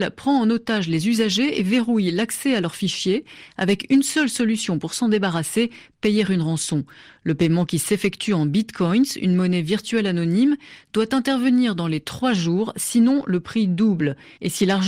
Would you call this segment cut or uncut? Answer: uncut